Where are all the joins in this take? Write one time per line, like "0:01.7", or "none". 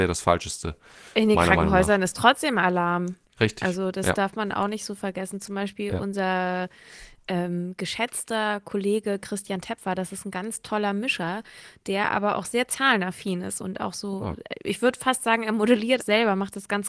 0:13.6
0:16.0